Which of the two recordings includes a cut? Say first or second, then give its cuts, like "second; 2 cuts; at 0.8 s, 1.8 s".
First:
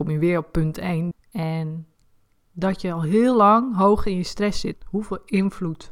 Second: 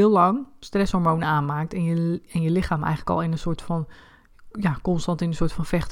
first; 2 cuts; at 1.1 s, 4.7 s